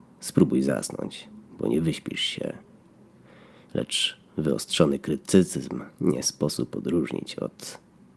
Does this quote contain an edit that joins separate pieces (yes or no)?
yes